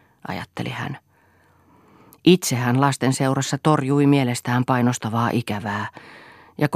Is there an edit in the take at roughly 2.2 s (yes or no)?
no